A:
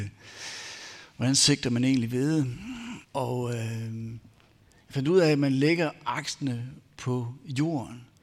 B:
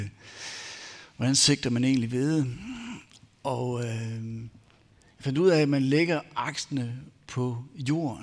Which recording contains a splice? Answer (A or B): A